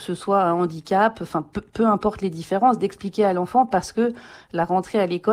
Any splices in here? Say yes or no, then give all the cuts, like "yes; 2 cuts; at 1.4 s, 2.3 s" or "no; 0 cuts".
no; 0 cuts